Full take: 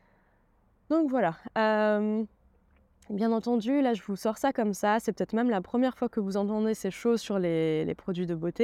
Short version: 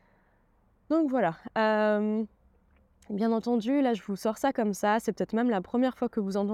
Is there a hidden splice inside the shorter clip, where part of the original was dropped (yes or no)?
no